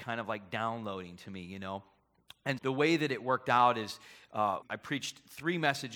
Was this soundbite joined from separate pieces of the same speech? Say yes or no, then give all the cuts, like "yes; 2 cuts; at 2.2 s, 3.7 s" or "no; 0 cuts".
yes; 2 cuts; at 2.6 s, 4.6 s